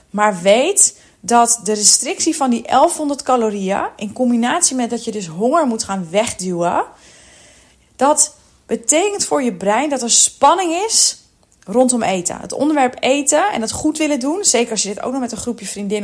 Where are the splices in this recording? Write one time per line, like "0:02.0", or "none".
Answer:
none